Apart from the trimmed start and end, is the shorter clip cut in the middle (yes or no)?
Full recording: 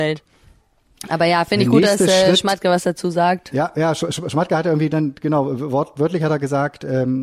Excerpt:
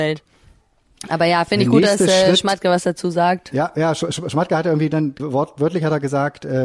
yes